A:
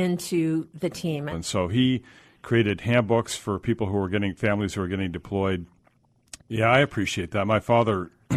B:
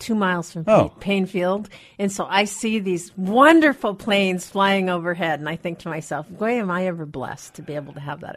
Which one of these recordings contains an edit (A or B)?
A